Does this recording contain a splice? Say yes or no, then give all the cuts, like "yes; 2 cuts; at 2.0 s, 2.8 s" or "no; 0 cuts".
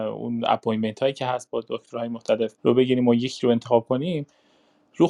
yes; 1 cut; at 2.6 s